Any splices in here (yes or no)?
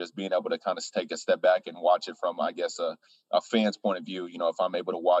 no